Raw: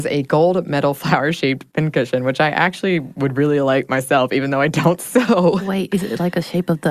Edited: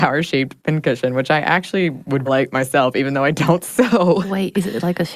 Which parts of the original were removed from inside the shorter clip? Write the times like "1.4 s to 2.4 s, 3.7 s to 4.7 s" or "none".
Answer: 3.3 s to 3.6 s